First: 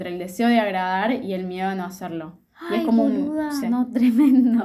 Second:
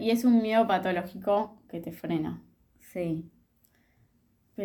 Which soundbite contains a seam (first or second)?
first